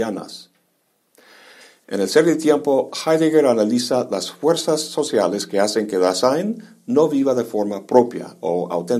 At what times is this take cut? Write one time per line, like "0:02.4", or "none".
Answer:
none